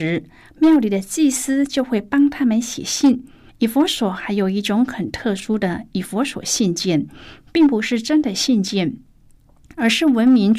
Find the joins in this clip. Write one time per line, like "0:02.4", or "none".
0:03.5